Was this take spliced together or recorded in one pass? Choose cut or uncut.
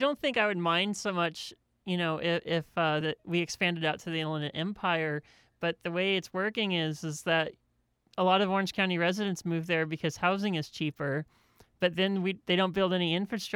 uncut